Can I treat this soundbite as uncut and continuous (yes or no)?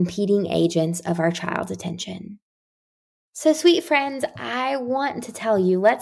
no